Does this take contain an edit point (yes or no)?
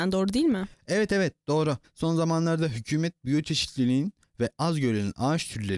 yes